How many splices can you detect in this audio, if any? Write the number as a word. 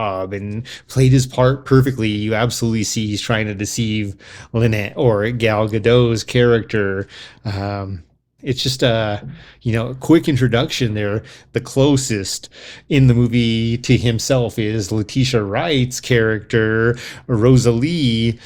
two